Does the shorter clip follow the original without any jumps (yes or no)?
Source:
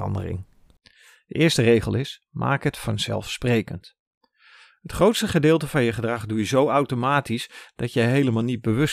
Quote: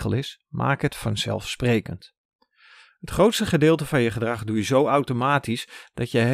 yes